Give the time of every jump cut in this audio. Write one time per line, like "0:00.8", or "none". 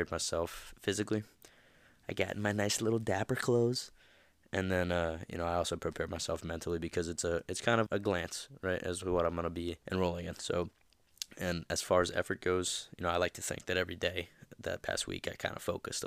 0:07.9
0:09.8

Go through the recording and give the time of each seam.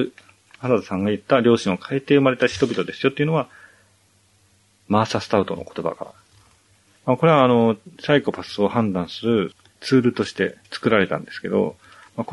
0:06.9
0:10.6

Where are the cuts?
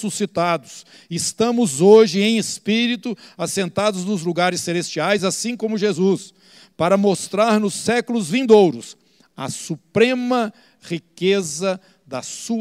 none

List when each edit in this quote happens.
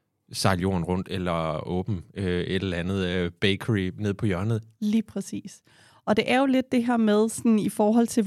0:04.7

